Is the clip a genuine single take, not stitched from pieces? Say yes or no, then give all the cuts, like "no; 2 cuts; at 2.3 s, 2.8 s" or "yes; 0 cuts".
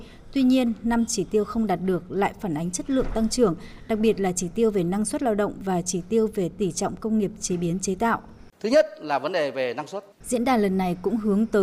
no; 1 cut; at 10.1 s